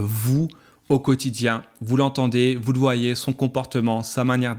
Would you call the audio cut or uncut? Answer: uncut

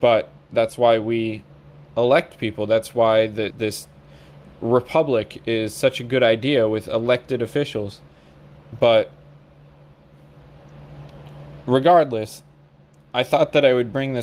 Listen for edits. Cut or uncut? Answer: cut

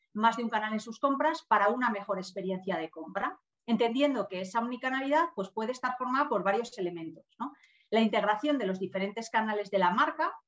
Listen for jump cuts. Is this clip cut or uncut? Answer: uncut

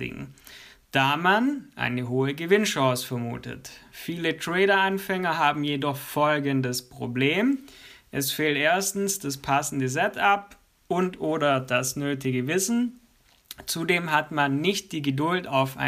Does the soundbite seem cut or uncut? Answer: uncut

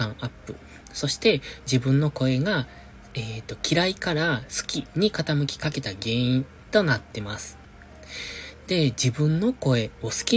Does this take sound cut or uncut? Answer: uncut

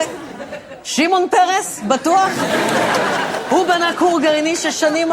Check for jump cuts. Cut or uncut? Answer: uncut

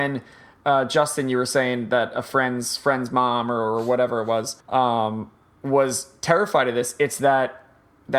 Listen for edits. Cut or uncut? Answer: cut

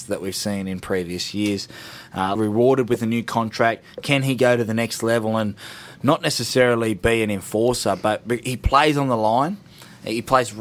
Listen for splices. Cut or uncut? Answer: cut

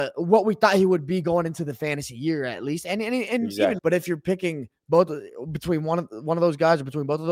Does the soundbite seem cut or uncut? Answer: cut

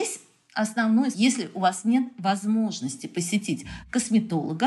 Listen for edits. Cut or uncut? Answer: cut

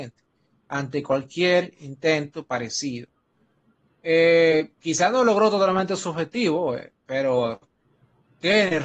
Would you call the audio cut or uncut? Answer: cut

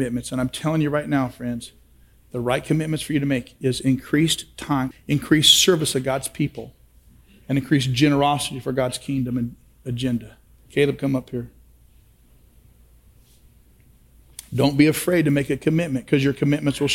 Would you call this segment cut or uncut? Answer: cut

